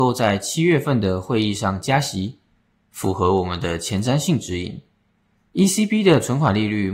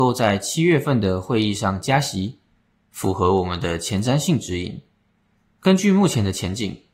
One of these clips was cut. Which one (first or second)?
first